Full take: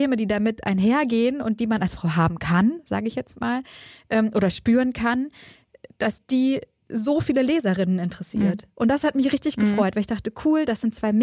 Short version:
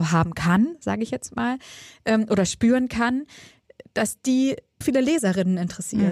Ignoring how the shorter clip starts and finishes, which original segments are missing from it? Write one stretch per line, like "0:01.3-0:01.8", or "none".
0:06.9-0:07.2